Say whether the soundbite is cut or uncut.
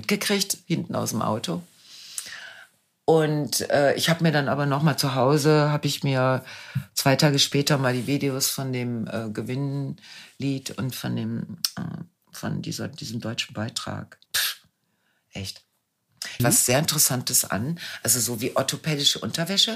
cut